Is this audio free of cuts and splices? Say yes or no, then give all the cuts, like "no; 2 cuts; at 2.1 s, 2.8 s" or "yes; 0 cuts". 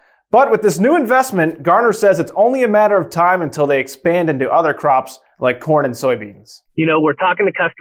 no; 1 cut; at 6.7 s